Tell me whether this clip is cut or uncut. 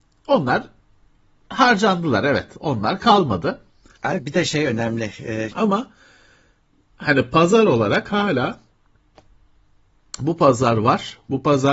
cut